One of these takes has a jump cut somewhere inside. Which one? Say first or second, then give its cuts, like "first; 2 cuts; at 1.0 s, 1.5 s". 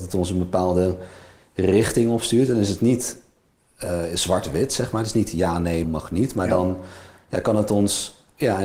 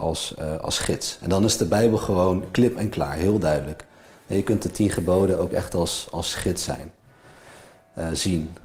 first; 1 cut; at 5.8 s